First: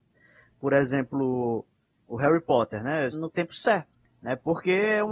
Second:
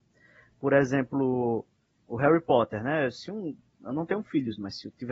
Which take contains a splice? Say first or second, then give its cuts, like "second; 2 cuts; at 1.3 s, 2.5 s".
first; 1 cut; at 3.1 s